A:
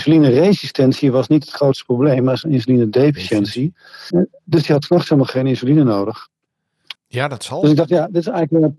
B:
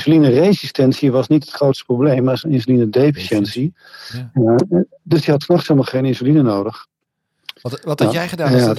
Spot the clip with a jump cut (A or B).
A